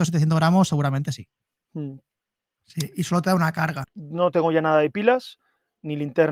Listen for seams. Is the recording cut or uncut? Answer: cut